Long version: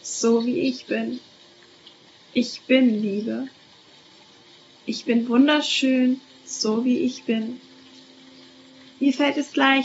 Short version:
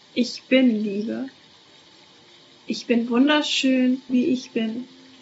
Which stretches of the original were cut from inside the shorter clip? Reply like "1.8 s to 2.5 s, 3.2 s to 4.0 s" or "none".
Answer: 6.3 s to 6.8 s